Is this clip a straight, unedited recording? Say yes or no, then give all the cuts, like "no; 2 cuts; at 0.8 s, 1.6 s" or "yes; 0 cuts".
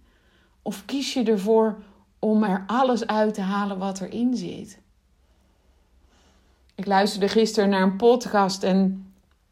yes; 0 cuts